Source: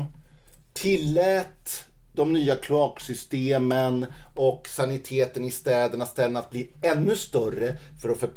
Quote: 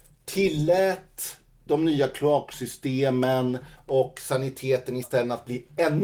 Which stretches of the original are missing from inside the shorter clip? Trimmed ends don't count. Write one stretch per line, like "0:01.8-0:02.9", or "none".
0:05.5-0:06.1